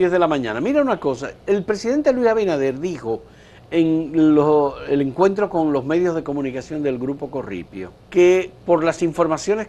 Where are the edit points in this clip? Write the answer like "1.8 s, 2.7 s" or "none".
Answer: 8.0 s

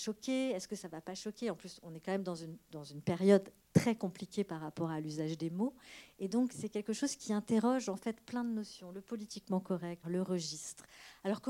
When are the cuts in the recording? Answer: 6.5 s, 10.0 s

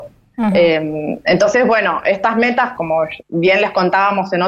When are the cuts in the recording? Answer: 2.7 s

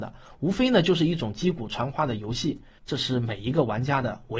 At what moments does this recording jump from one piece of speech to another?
2.8 s

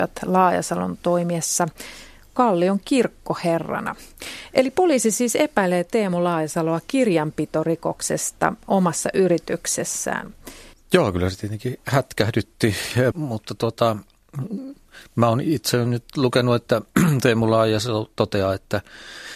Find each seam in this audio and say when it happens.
10.7 s, 13.1 s

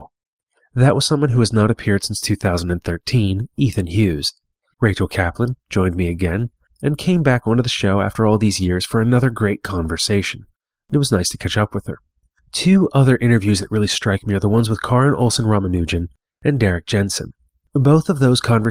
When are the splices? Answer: 4.7 s, 6.7 s

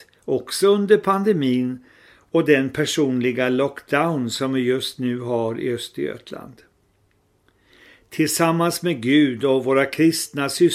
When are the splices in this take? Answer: none

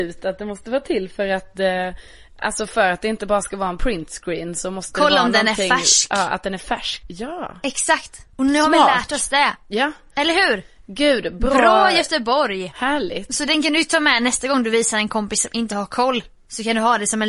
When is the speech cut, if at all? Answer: 7.0 s, 12.7 s

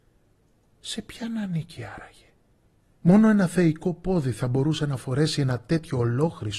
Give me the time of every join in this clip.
none

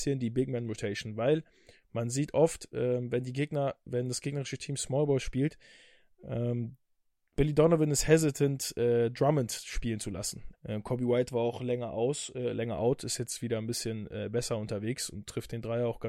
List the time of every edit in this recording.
10.5 s

